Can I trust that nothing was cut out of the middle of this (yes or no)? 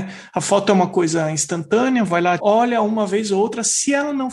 no